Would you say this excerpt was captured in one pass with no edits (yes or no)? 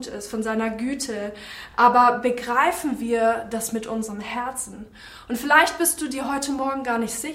yes